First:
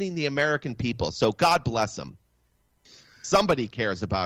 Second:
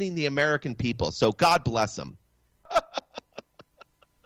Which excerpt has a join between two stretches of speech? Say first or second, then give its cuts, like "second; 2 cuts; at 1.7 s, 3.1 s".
second; 1 cut; at 2.7 s